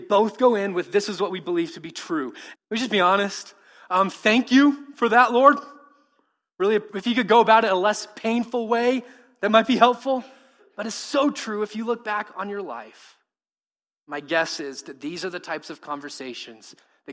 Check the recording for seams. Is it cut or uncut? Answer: cut